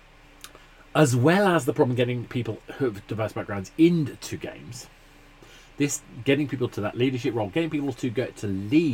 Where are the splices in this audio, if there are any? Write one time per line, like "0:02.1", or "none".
none